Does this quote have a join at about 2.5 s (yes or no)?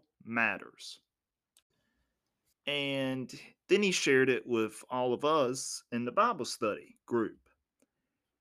yes